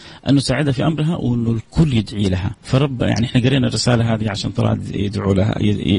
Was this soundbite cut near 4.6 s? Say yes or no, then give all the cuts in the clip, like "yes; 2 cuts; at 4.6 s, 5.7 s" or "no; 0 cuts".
no; 1 cut; at 2.6 s